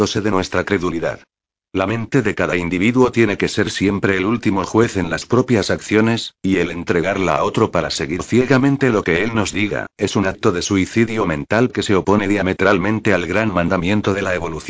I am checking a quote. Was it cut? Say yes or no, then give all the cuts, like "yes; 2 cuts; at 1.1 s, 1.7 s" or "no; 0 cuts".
no; 0 cuts